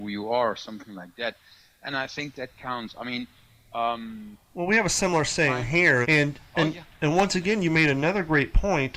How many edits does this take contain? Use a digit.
1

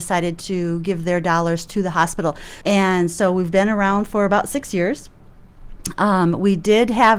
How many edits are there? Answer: 1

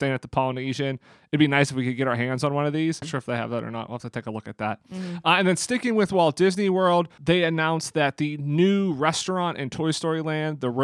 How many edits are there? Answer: 1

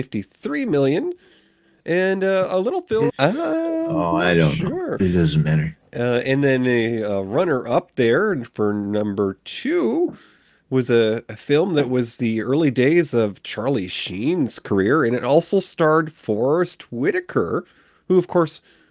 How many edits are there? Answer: 1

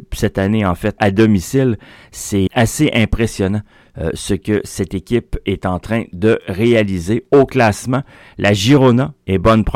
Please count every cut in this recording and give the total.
2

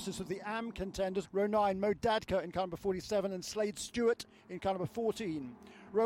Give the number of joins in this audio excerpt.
1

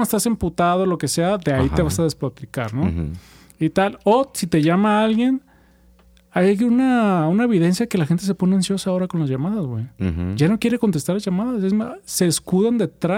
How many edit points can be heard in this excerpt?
0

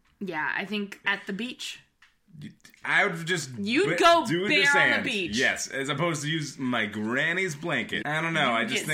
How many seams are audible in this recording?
2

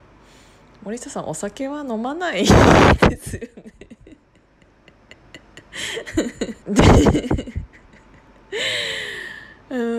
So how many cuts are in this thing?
1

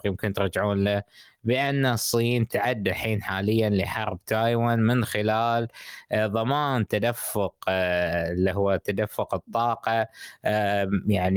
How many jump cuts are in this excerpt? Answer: 1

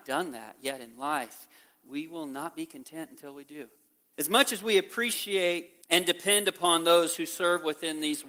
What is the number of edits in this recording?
2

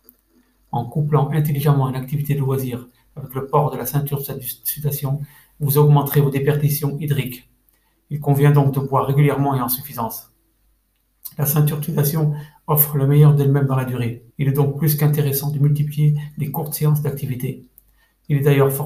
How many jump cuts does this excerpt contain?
1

